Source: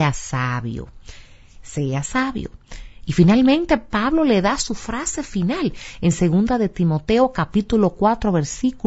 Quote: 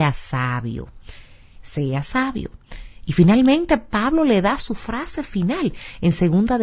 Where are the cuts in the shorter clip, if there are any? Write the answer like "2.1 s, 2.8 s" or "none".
none